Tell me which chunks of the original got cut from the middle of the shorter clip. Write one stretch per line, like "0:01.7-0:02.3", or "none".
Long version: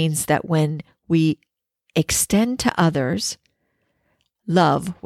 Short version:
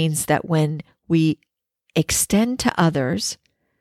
none